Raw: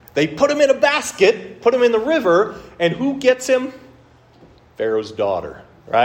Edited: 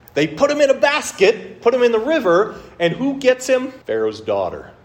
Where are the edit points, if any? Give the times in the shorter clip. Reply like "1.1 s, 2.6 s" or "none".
3.8 s